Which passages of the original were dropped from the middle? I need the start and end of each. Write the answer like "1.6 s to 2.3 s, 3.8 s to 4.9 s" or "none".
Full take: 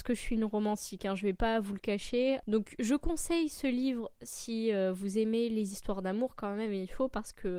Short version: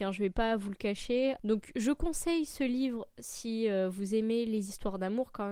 none